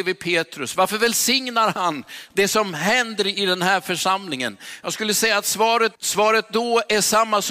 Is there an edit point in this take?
yes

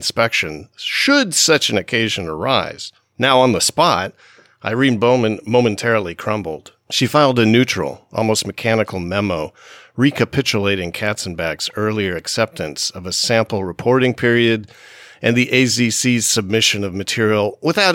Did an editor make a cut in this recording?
no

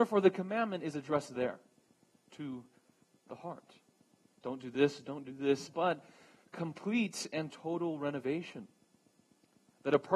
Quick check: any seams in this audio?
yes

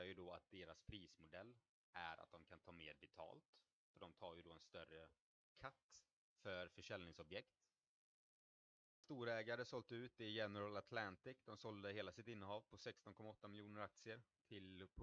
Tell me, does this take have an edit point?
no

